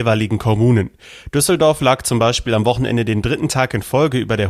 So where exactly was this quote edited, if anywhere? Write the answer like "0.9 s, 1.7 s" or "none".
none